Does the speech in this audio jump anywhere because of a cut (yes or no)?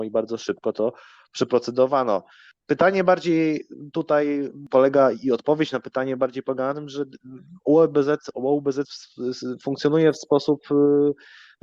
no